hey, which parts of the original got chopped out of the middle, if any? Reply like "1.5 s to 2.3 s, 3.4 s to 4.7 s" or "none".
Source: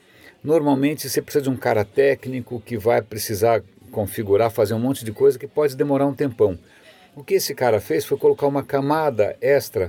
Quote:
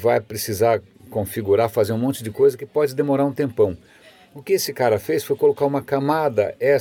none